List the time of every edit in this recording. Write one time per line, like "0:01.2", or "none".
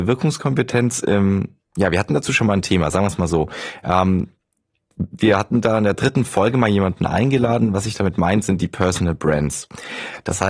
none